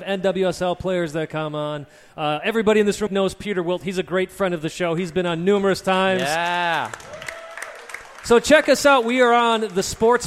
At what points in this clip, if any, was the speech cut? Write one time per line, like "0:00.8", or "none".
0:03.1